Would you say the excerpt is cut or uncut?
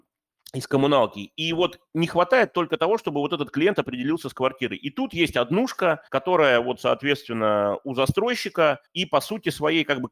cut